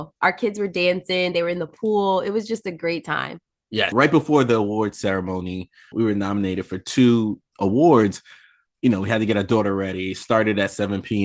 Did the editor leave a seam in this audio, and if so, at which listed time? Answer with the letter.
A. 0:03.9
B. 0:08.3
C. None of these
A